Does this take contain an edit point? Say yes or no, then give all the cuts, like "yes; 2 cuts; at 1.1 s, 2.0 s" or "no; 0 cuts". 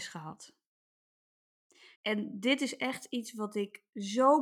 yes; 1 cut; at 2.0 s